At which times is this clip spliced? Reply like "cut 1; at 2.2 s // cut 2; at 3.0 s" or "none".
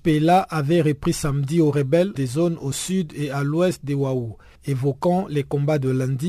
none